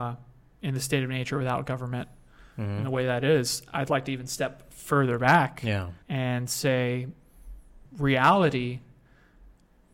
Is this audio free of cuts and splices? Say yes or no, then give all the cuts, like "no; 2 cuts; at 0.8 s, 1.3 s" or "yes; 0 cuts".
no; 2 cuts; at 6.0 s, 7.9 s